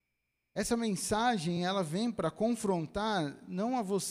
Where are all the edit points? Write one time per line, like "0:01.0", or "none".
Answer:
none